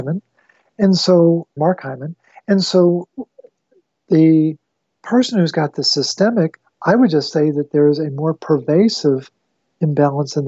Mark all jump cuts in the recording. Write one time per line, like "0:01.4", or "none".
0:01.6